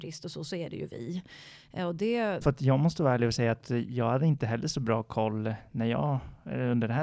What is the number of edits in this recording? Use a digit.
1